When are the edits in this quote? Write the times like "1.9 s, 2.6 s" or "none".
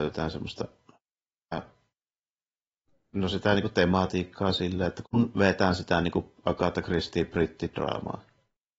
5.0 s